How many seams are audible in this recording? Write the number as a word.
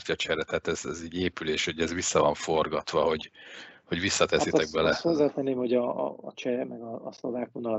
zero